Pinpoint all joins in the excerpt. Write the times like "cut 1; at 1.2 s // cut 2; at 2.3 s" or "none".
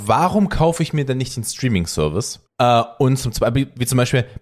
cut 1; at 2.5 s